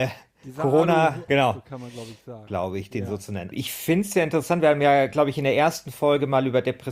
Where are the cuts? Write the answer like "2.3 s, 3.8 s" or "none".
1.3 s, 2.5 s, 3.5 s